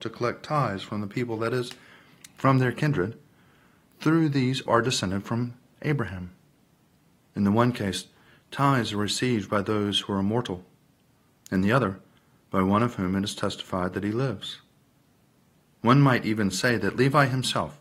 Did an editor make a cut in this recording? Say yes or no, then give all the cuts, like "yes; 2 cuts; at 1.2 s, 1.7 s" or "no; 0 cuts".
yes; 2 cuts; at 4.7 s, 7.3 s